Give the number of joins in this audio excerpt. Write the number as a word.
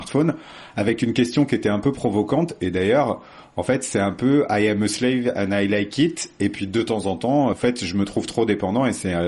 one